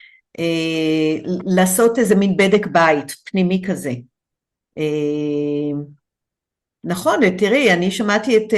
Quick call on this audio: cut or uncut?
uncut